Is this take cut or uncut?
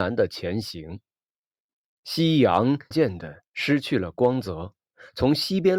cut